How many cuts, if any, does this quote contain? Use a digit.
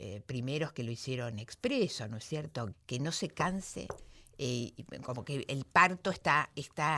1